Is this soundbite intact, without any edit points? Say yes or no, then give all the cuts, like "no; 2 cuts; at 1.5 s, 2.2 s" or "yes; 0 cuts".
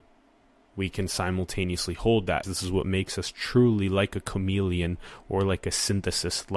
no; 1 cut; at 2.4 s